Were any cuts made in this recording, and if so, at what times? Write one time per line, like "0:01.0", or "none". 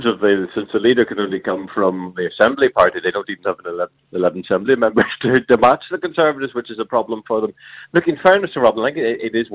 none